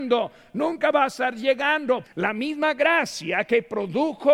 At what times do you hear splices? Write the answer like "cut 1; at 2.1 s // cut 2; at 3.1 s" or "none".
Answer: cut 1; at 2.0 s